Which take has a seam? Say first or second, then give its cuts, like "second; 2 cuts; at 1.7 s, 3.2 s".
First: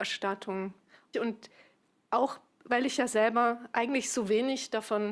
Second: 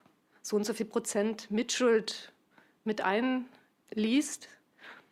first; 1 cut; at 1.1 s